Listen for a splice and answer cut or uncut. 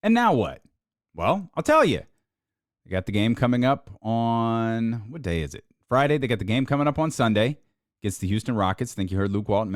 uncut